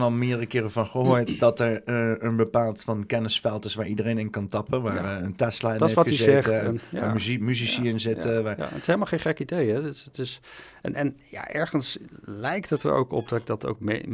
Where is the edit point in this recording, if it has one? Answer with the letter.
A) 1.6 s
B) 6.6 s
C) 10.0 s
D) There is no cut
D